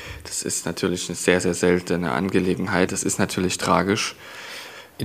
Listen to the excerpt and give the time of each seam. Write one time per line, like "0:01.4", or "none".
0:02.9